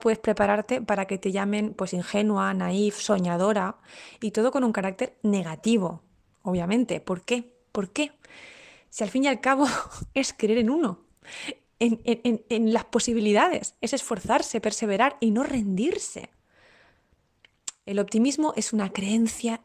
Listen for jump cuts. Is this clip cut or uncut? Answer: uncut